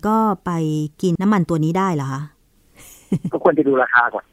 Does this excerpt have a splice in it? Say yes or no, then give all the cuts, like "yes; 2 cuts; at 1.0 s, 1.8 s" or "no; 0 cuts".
yes; 1 cut; at 1.2 s